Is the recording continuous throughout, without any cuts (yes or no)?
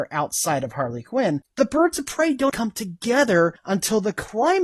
no